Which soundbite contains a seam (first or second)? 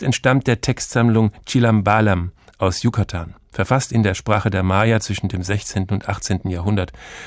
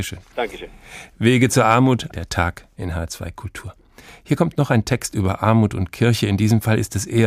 second